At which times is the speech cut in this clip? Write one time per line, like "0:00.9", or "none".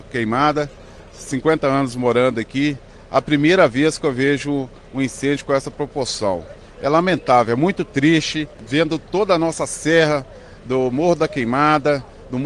none